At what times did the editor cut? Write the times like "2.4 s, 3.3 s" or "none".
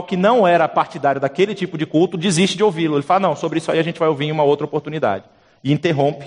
none